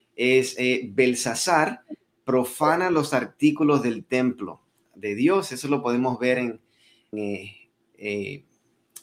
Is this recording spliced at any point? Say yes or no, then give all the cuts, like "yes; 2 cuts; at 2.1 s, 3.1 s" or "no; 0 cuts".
yes; 1 cut; at 7.1 s